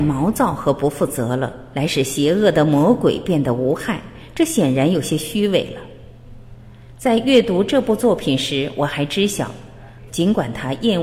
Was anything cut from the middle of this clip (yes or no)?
yes